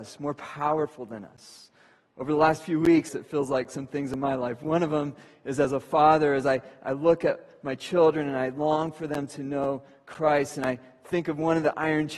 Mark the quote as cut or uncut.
cut